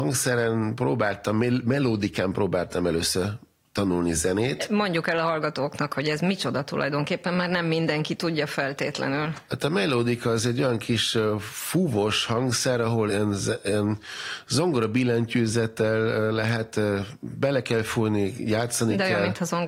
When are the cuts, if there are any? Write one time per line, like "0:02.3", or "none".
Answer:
0:13.1